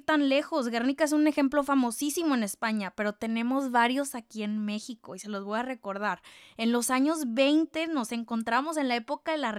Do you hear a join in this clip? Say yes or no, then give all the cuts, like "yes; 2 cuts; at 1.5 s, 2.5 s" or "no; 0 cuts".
no; 0 cuts